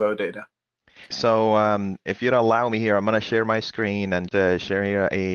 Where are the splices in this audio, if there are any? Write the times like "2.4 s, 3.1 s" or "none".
1.1 s, 4.3 s

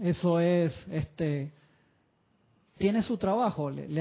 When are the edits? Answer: 2.8 s

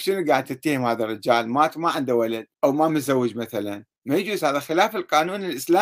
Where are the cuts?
2.5 s, 3.9 s

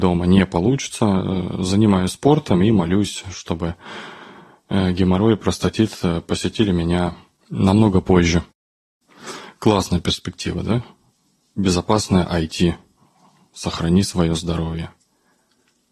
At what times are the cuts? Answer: none

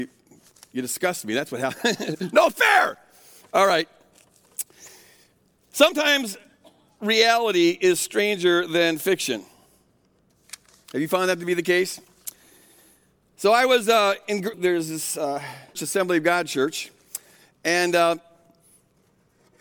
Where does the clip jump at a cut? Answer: 14.5 s, 15.7 s

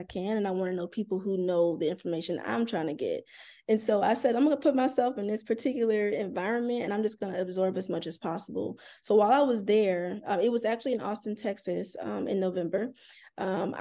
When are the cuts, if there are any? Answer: none

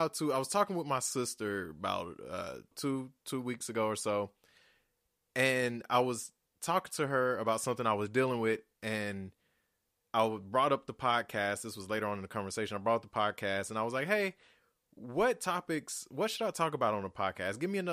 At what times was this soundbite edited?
2.7 s

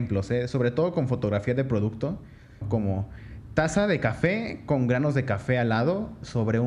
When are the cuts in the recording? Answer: 2.6 s

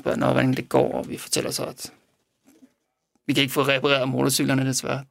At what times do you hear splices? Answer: none

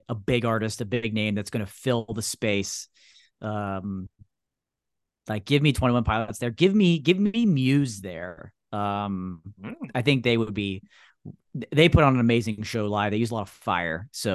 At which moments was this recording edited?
none

